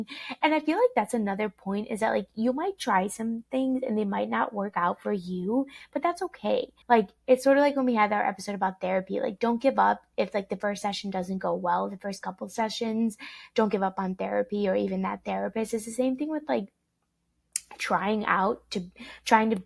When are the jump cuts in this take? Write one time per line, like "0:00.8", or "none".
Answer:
0:06.8